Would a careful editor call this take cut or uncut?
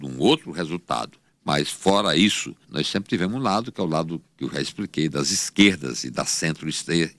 cut